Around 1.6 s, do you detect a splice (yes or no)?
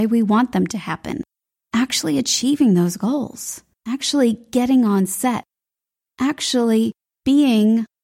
no